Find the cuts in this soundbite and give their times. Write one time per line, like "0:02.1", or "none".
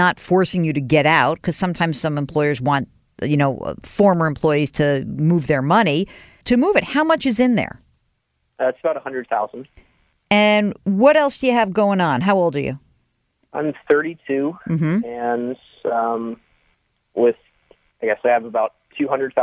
0:06.4